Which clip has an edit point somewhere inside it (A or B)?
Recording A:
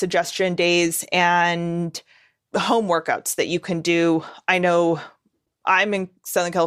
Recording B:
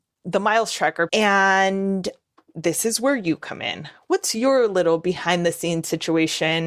B